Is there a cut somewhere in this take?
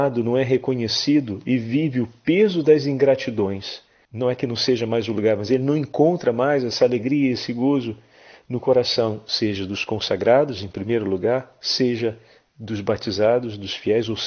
yes; 1 cut; at 4.0 s

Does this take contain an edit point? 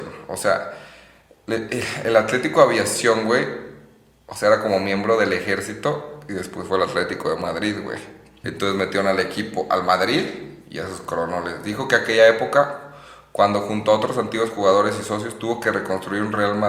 yes; 1 cut; at 8.4 s

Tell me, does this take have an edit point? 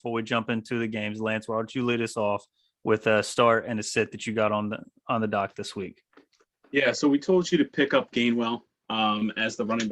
no; 0 cuts

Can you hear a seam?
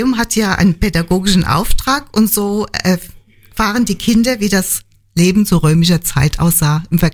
no; 0 cuts

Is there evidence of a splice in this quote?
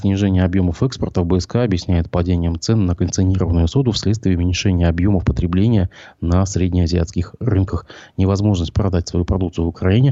no; 0 cuts

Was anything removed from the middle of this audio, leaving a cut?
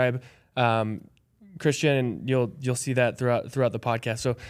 no; 0 cuts

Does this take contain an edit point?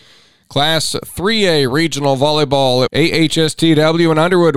yes; 1 cut; at 2.9 s

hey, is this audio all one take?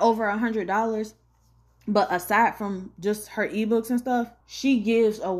no; 1 cut; at 4.4 s

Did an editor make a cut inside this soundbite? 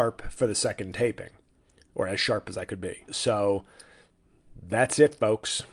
yes; 1 cut; at 3.1 s

